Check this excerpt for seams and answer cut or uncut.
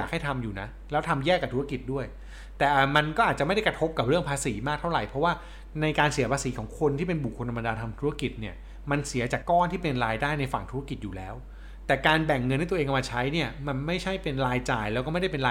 cut